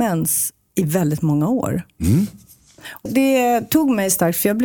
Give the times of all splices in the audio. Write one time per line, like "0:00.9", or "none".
0:03.1